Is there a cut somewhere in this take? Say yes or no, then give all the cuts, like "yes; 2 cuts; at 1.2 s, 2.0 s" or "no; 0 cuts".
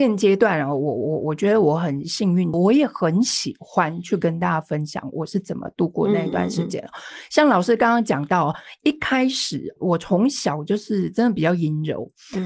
yes; 1 cut; at 2.5 s